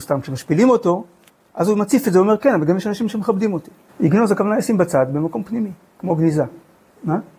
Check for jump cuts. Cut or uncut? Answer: cut